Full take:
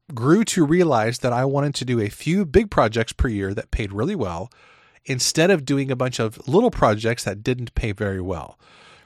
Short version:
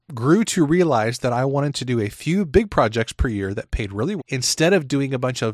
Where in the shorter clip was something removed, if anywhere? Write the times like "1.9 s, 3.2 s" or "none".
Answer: 4.2 s

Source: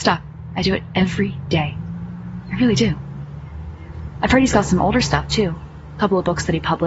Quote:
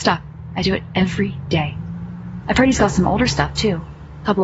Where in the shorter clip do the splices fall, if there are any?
2.4 s

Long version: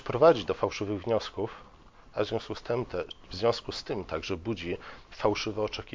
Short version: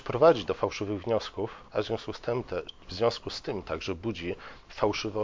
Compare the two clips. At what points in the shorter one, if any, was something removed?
1.7 s

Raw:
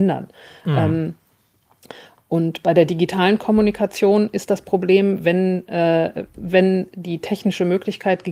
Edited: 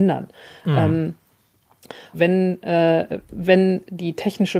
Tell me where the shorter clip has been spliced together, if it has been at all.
2.1 s

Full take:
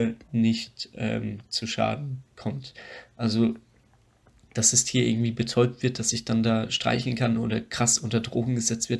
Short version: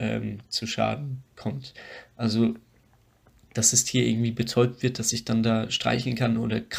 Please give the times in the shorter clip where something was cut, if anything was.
none

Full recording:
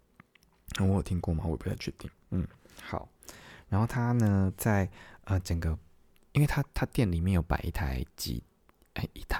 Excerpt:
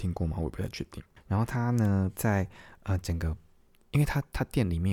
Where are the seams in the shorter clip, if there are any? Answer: 1.2 s

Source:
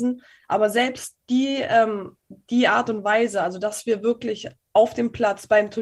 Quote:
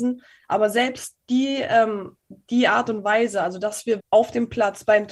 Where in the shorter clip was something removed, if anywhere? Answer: 4.0 s

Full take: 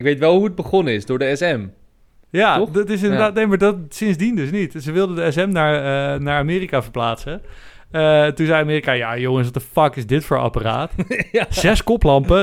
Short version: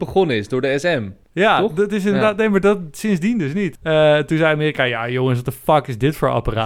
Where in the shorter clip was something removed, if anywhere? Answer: 1.2 s, 3.8 s

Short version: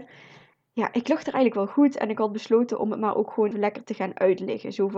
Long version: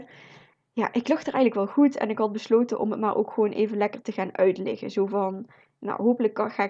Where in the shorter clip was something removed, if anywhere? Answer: 3.5 s

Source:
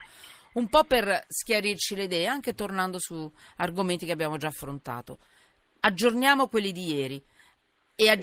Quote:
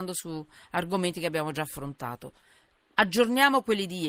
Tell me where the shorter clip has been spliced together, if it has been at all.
none

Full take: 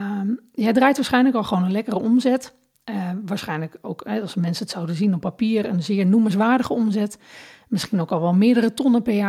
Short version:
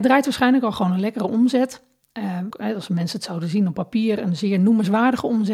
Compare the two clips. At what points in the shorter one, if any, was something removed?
2.5 s

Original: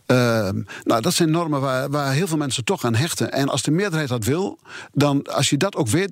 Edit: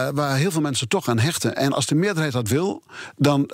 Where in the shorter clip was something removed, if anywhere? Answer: none

